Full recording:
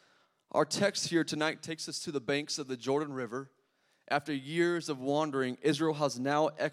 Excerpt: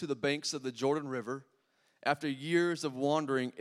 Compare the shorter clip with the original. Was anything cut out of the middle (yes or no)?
no